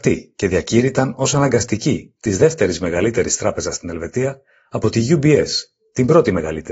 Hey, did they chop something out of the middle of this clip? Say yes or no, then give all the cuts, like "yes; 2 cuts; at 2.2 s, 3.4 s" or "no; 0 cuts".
yes; 1 cut; at 2.2 s